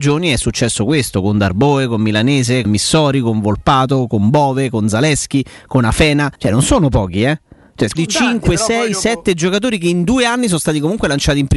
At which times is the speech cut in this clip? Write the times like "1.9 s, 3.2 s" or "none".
2.6 s, 6.3 s, 8.0 s